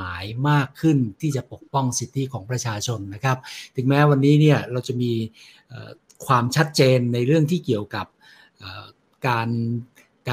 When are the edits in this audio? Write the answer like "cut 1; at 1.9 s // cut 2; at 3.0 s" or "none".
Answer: none